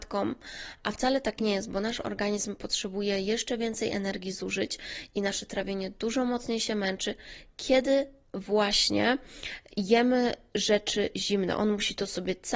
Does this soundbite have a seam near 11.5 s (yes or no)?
no